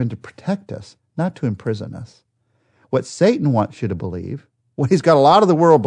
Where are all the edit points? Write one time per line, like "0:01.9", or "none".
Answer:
none